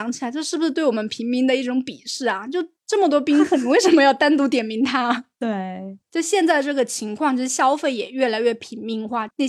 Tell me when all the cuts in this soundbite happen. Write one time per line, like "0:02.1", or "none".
none